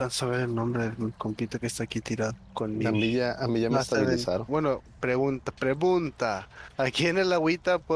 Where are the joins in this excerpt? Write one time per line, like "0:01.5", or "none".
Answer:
0:04.5